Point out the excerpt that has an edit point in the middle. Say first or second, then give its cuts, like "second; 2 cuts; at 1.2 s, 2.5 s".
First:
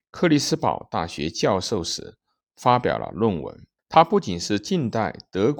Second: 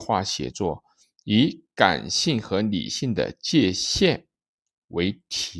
first; 1 cut; at 3.8 s